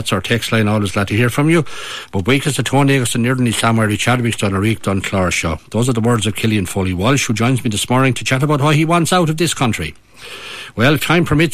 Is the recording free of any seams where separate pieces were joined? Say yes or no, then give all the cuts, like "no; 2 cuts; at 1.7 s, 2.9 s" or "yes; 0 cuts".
no; 1 cut; at 5.6 s